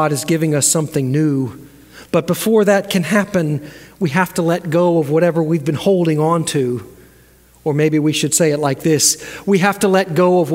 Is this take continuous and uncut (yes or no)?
yes